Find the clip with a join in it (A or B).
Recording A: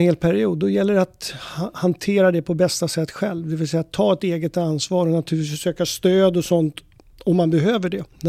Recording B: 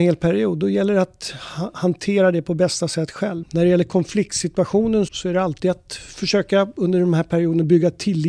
B